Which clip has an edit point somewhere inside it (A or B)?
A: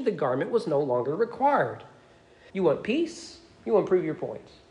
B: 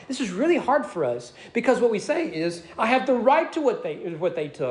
A